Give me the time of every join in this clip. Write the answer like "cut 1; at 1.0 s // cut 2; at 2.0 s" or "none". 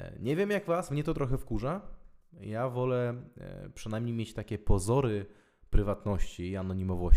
none